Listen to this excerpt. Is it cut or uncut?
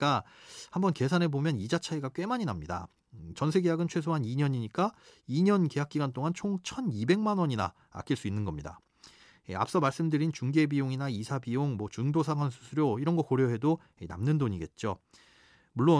cut